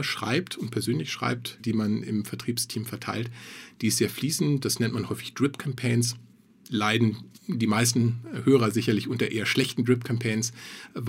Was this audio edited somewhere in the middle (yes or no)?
yes